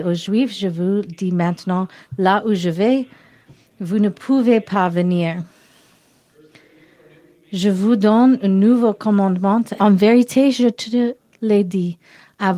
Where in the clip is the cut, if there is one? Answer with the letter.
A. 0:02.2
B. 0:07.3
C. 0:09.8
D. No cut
C